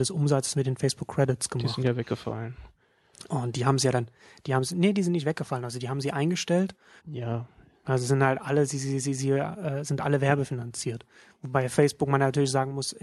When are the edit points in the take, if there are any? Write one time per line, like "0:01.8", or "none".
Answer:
0:07.0